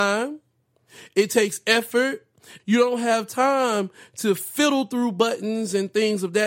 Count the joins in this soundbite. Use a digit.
1